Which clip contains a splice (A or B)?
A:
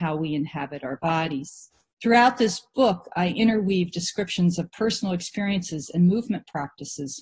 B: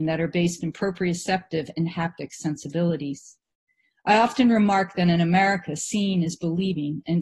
A